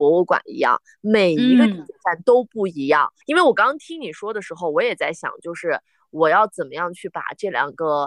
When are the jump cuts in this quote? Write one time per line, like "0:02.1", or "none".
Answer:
none